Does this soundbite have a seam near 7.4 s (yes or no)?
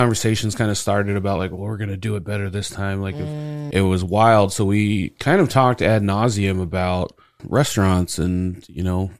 yes